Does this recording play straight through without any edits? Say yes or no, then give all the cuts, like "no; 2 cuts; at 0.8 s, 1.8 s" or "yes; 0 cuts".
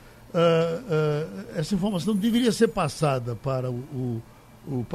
yes; 0 cuts